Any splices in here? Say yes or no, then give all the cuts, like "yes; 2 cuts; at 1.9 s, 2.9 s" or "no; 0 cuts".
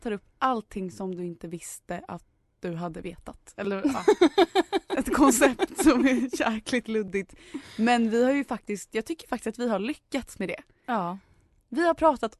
no; 0 cuts